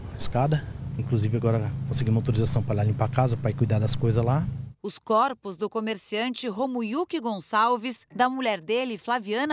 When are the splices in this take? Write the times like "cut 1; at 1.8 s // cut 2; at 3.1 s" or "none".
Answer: cut 1; at 1.0 s